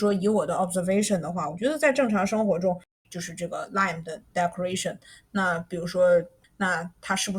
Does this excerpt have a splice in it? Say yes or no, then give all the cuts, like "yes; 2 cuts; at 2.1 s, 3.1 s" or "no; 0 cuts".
yes; 2 cuts; at 3.0 s, 6.4 s